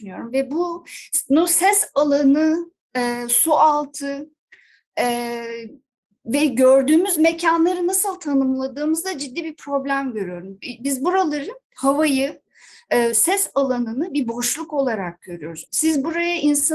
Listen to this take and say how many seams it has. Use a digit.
2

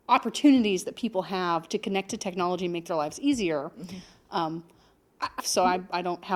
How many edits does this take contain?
1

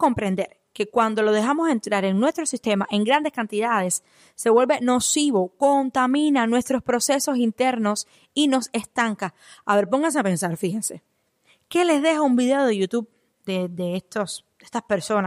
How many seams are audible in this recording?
0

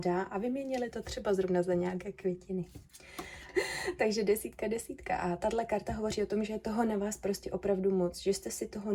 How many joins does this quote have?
1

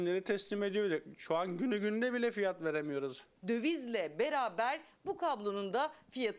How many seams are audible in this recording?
1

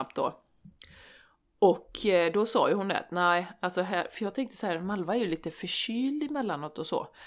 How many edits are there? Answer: 0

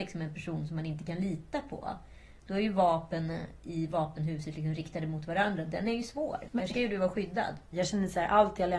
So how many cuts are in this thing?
2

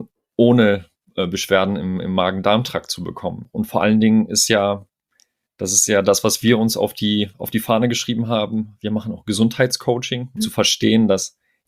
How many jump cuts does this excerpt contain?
2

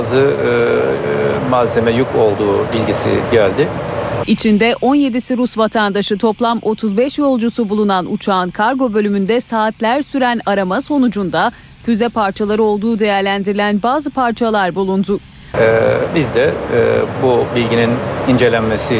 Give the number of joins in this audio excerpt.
2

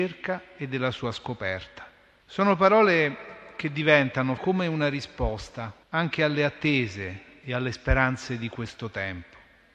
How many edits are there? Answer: 3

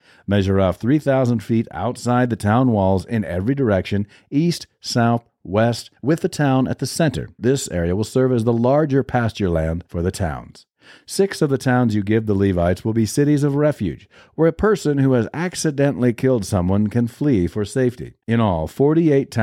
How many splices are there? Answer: 2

